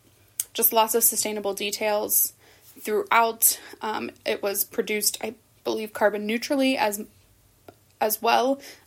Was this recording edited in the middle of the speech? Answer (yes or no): no